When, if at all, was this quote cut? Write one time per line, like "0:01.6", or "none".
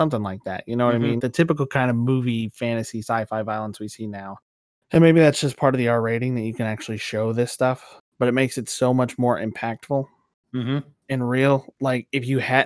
0:01.2